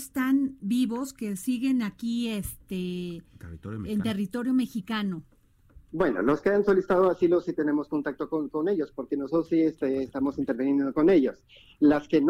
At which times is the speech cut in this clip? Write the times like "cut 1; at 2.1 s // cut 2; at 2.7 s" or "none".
none